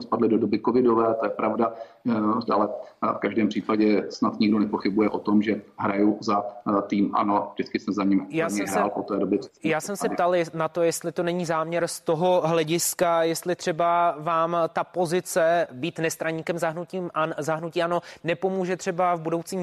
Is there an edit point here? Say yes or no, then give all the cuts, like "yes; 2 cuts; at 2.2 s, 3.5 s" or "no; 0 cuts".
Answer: yes; 1 cut; at 2.5 s